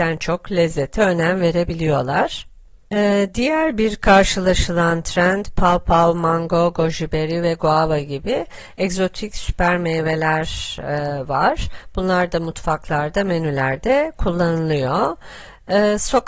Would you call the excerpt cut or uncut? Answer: uncut